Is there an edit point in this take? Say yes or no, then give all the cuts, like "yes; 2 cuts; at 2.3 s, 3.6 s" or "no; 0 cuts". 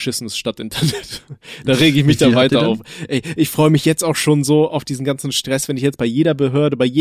no; 0 cuts